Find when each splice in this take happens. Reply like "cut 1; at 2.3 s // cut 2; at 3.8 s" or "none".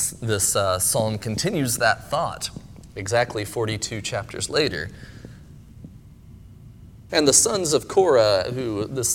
cut 1; at 7.1 s

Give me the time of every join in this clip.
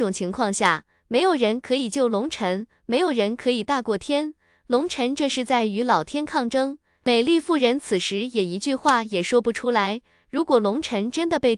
none

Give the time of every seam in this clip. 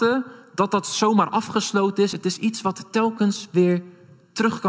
none

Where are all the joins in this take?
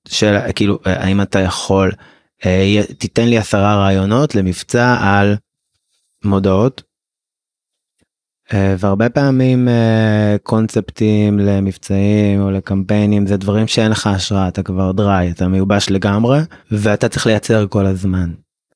cut 1; at 6.2 s // cut 2; at 16.6 s

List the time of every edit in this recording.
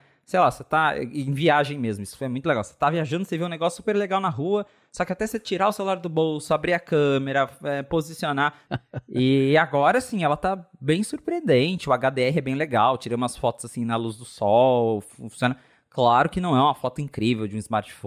cut 1; at 8.6 s

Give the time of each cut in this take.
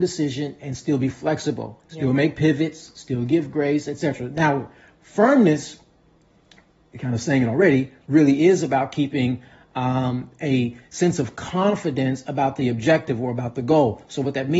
none

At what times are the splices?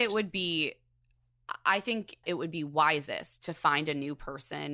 cut 1; at 2.2 s

